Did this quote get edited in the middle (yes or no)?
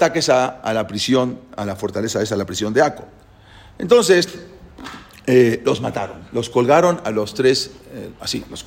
no